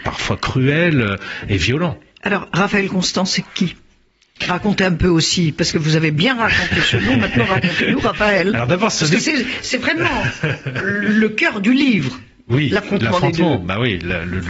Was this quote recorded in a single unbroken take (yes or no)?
yes